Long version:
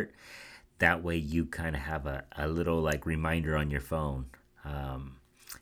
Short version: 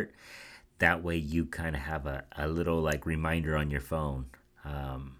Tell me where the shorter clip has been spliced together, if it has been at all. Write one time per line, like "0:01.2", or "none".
none